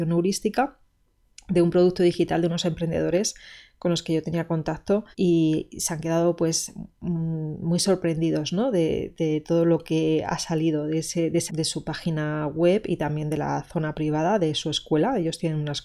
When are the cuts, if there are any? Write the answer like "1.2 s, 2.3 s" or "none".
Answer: 5.1 s, 11.5 s